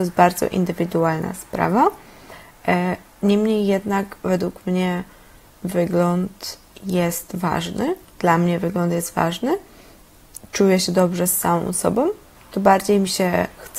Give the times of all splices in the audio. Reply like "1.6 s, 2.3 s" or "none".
10.4 s